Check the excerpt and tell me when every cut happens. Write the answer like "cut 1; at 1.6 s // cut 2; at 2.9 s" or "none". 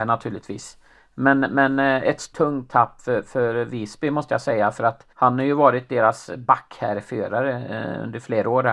cut 1; at 2.3 s // cut 2; at 5.1 s